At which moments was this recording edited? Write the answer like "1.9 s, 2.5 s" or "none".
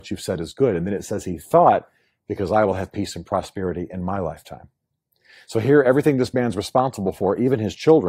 none